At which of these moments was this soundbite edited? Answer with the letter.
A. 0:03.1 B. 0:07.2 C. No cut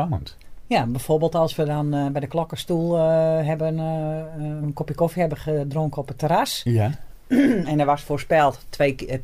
C